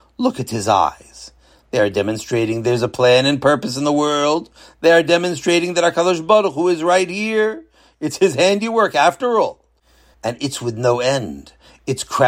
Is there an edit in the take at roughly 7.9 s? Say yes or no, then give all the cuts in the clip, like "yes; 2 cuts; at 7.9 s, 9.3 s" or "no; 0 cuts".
no; 1 cut; at 10.1 s